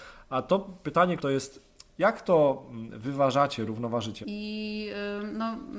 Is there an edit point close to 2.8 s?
no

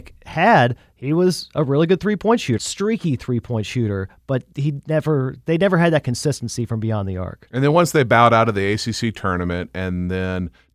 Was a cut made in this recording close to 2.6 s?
yes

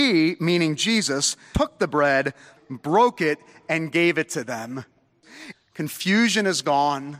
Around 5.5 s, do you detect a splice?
yes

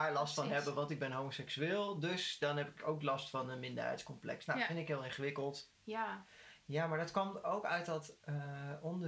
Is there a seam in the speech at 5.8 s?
yes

